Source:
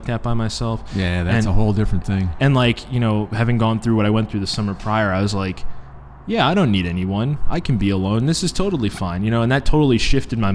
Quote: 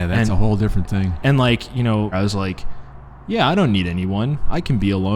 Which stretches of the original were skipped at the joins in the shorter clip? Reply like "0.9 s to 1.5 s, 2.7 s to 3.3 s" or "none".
3.3 s to 5.1 s